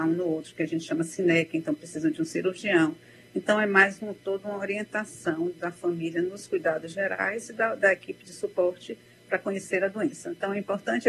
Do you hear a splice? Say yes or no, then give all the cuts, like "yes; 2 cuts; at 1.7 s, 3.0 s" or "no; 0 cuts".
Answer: no; 0 cuts